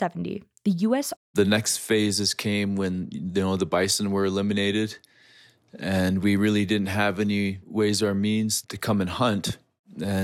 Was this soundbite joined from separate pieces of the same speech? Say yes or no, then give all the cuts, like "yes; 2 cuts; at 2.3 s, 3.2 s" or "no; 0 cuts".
yes; 2 cuts; at 1.1 s, 8.6 s